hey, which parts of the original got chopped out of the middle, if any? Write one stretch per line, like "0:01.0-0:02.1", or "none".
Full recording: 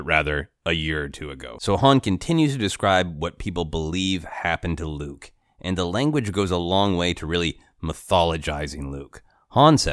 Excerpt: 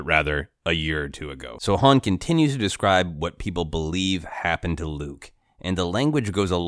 none